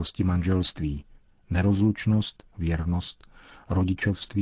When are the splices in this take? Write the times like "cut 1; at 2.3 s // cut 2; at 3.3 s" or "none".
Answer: cut 1; at 2.5 s